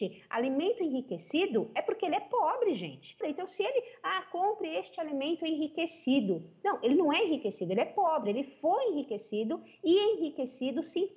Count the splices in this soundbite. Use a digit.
1